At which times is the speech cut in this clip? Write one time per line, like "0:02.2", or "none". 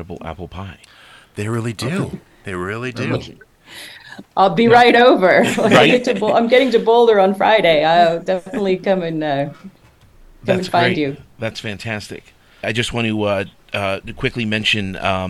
0:12.6